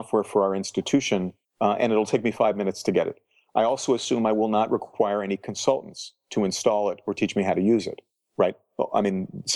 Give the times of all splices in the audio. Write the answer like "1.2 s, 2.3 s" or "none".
1.4 s